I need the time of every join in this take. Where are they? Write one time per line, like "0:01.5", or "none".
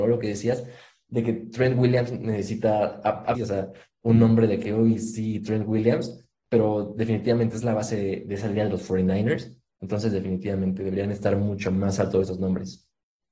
0:03.3